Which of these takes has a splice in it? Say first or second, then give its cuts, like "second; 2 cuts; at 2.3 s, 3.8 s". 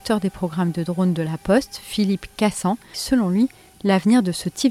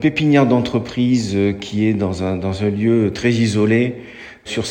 first; 1 cut; at 2.9 s